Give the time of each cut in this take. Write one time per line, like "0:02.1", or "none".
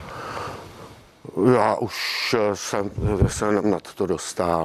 0:03.6